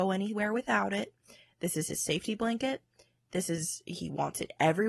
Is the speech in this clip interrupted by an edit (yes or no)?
no